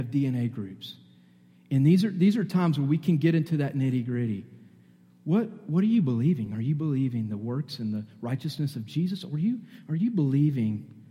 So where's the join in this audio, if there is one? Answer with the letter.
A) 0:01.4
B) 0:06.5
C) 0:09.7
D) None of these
D